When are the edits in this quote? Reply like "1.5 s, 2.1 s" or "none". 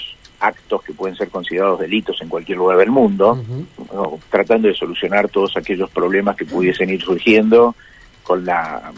4.2 s